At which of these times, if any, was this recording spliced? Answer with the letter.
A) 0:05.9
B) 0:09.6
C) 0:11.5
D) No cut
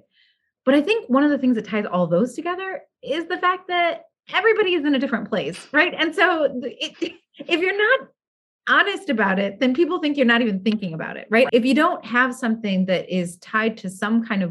C